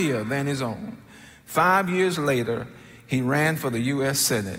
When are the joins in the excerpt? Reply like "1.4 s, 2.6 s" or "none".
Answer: none